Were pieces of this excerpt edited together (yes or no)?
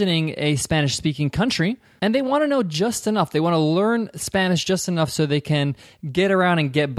no